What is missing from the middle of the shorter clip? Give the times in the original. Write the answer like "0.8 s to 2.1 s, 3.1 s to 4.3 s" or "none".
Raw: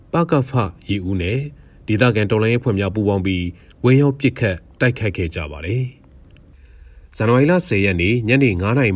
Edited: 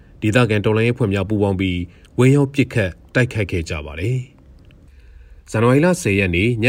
none